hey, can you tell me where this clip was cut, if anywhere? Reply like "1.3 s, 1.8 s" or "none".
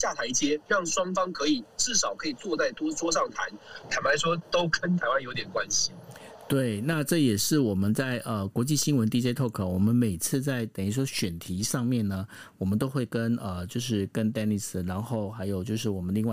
3.8 s